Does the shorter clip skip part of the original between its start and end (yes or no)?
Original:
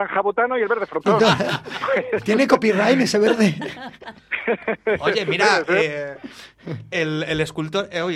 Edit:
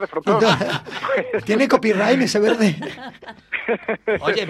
no